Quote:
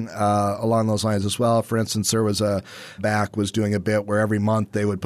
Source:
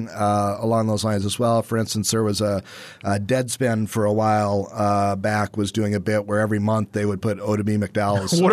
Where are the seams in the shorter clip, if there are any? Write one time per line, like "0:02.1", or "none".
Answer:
0:03.0

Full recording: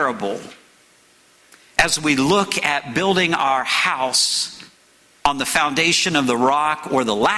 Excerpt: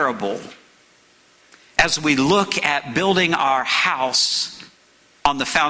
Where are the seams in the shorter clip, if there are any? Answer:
none

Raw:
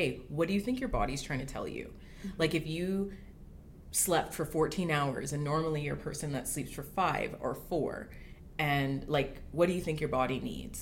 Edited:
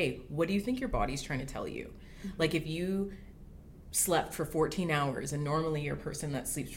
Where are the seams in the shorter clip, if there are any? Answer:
none

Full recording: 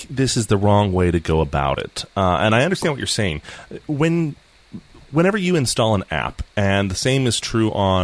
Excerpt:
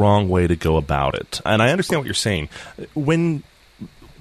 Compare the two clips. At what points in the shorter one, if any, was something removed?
0:01.5

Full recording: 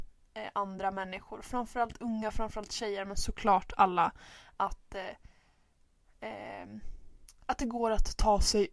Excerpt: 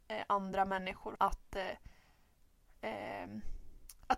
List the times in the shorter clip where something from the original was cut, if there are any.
0:01.2

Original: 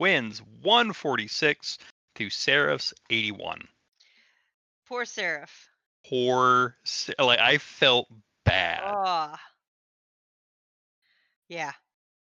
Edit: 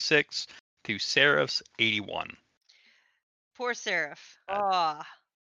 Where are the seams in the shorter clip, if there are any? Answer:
0:04.5

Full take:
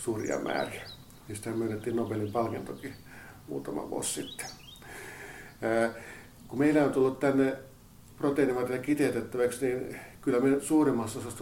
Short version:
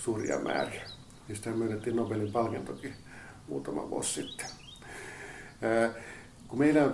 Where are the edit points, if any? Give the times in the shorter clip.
none

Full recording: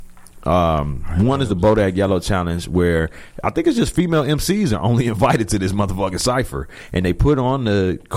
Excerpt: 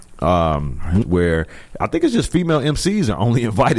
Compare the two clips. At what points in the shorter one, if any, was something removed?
0:01.0

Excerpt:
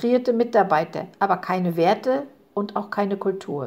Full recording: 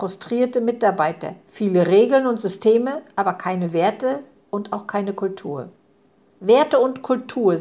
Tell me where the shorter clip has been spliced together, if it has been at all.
0:01.1

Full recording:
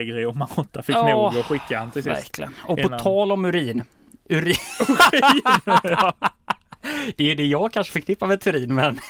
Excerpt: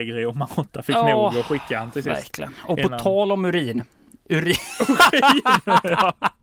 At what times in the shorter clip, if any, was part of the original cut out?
none

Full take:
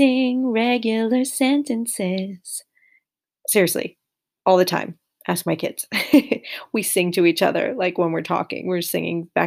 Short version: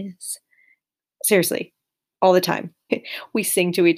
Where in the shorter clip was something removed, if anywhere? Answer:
0:02.9

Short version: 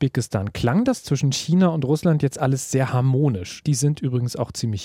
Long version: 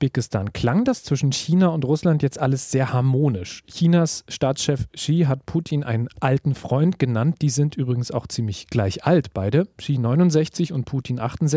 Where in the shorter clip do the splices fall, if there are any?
0:03.6

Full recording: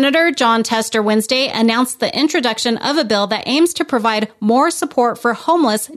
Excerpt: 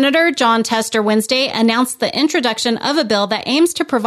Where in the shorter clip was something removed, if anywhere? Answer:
none

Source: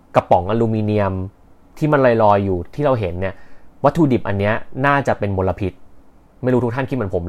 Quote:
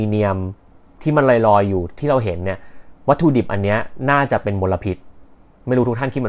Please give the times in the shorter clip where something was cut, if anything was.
none

